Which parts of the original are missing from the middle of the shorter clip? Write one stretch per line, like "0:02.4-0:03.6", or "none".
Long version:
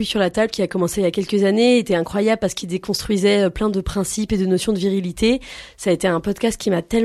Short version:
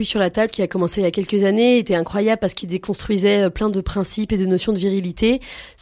none